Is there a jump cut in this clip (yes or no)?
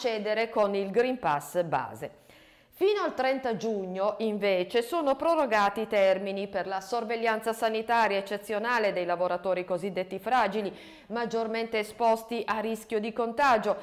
no